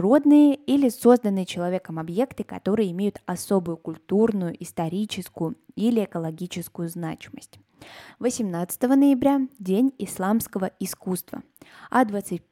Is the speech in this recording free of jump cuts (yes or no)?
no